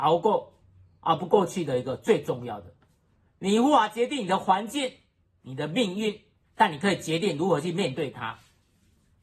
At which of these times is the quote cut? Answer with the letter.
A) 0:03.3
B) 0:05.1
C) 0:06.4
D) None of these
C